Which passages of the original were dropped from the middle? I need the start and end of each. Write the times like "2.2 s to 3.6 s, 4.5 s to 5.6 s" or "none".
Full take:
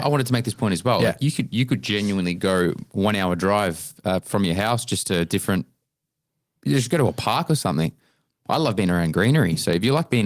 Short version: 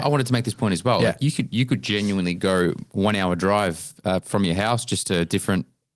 none